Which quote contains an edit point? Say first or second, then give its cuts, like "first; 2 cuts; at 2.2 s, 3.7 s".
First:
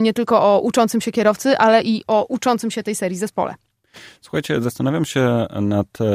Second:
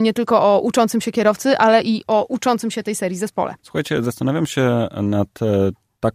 second; 1 cut; at 3.6 s